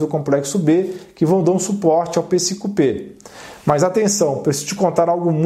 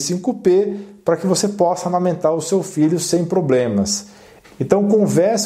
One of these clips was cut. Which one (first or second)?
second